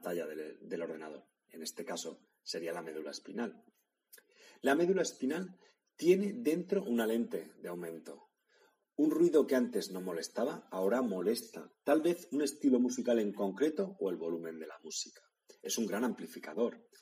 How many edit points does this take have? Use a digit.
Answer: 0